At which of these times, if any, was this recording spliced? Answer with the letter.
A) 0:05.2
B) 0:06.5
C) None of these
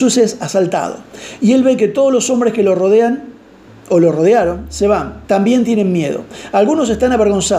A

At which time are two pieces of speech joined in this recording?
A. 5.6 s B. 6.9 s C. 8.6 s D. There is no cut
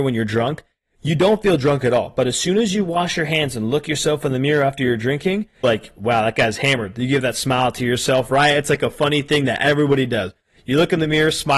A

